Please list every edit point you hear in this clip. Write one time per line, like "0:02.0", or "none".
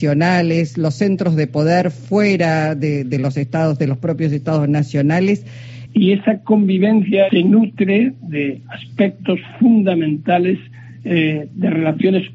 0:05.9
0:07.3